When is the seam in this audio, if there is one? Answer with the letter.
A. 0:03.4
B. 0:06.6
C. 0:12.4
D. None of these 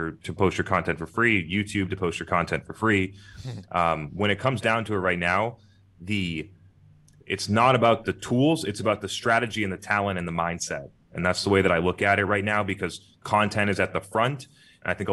D